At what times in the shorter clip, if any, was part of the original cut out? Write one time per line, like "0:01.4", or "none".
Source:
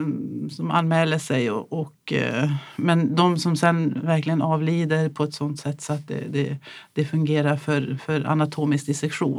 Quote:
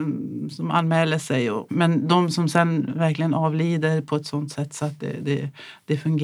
0:01.7